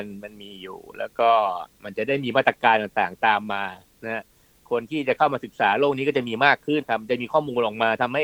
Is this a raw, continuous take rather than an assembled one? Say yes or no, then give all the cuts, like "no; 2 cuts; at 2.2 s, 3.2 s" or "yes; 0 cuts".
no; 1 cut; at 6.8 s